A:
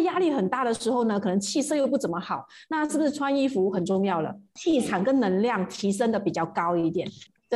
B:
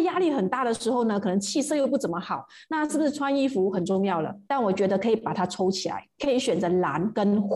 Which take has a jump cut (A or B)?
B